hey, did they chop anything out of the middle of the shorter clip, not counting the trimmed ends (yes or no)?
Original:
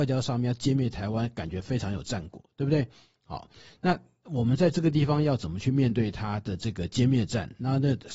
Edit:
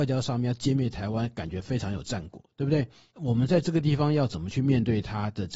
yes